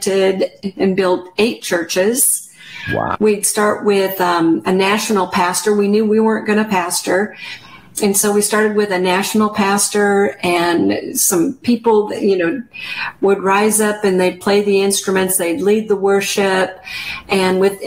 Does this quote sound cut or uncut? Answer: cut